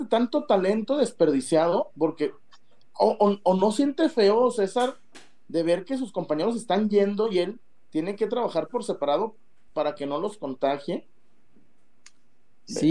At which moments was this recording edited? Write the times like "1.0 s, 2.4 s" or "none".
9.7 s